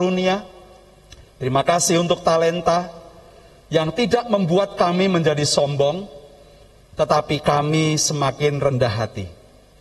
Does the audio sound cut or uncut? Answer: uncut